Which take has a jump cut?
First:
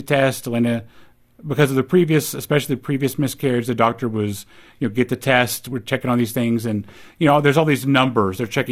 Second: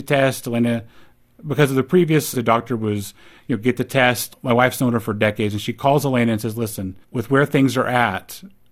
second; 3 cuts; at 2.3 s, 4.3 s, 7.0 s

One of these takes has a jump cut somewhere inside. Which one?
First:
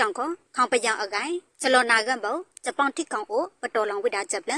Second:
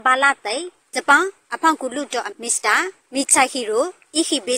second; 1 cut; at 2.3 s

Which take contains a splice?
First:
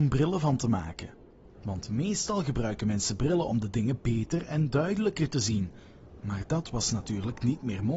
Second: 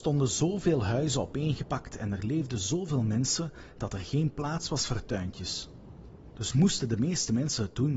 first; 1 cut; at 1.5 s

